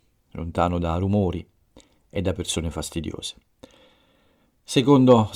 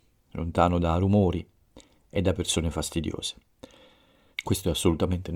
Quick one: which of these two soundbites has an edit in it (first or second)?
second